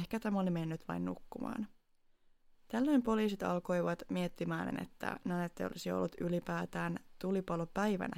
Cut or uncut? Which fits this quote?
cut